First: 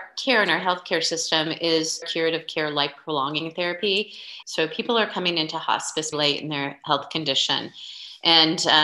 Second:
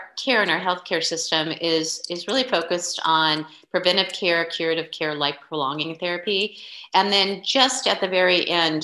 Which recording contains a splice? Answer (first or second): first